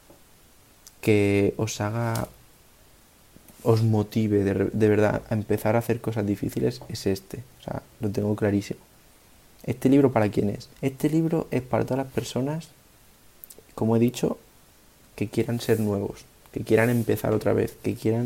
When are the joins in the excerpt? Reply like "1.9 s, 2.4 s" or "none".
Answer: 10.7 s